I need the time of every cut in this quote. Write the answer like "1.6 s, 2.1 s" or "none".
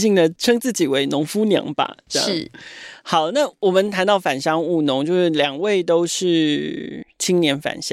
none